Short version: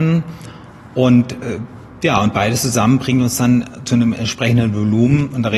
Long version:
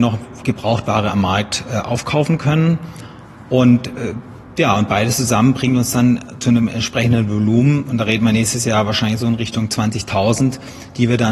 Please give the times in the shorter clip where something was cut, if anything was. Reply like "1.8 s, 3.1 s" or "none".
none